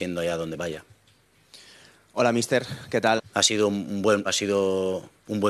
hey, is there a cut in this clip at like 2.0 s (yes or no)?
no